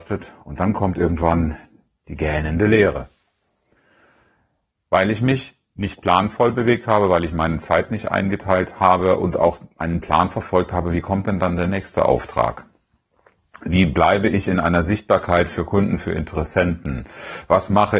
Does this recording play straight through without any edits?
yes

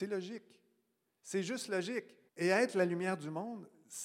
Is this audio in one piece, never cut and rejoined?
no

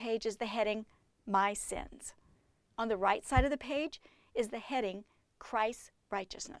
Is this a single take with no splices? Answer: yes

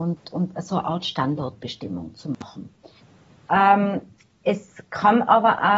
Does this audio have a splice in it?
yes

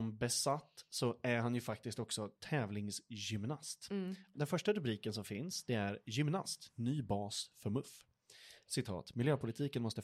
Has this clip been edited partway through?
yes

